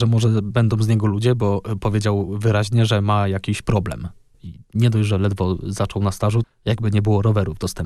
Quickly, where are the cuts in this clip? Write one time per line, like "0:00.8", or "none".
0:04.3
0:06.4

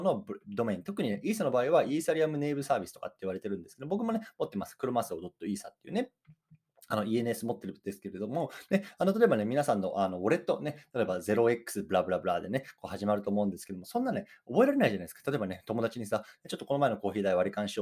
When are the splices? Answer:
none

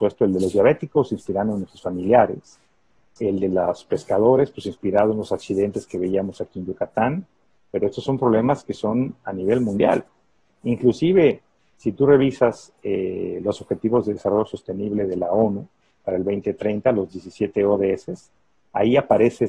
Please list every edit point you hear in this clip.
none

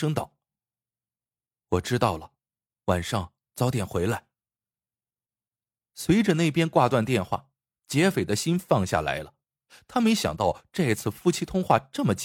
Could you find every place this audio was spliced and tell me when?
none

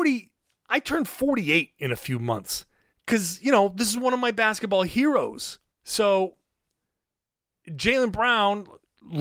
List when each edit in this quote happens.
0:02.9
0:05.7

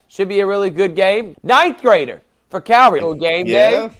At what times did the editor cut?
0:01.3
0:03.0

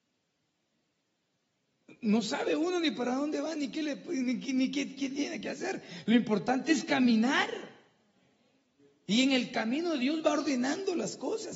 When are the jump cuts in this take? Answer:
none

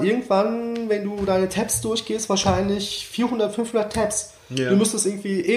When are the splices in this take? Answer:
none

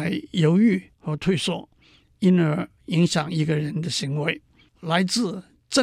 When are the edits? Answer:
0:04.7

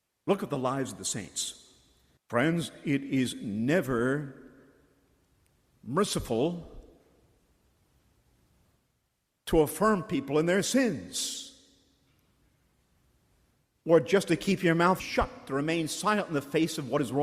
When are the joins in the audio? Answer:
0:02.2

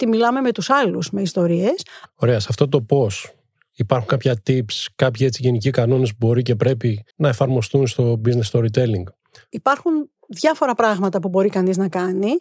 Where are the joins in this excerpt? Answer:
0:02.1
0:07.1

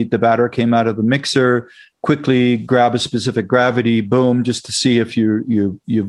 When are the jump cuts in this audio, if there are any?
none

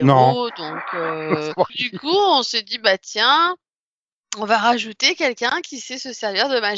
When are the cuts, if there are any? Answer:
0:01.7

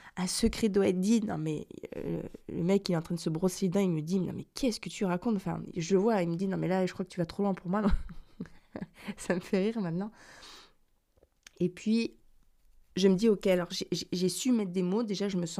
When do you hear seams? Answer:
none

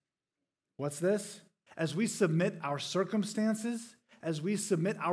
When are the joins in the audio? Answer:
0:01.7
0:04.1

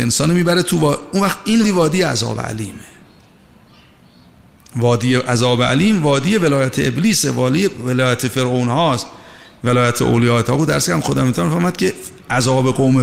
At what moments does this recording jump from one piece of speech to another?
0:01.6

